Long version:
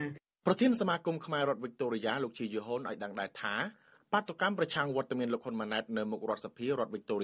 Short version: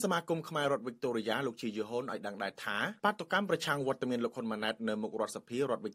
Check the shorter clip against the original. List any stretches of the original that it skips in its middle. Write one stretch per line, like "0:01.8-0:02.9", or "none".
0:03.7-0:04.1